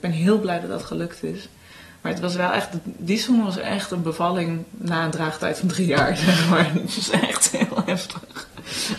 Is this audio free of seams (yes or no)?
yes